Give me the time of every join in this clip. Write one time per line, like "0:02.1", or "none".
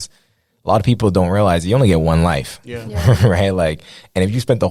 none